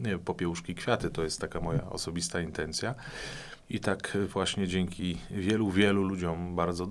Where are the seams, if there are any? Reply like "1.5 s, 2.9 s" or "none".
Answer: 3.6 s